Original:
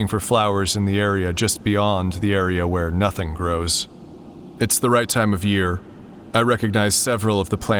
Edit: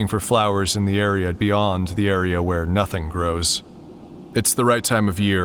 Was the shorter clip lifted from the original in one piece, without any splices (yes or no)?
no